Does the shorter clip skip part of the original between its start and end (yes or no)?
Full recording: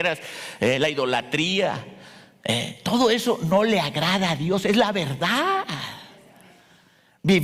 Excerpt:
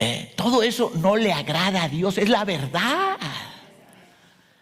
no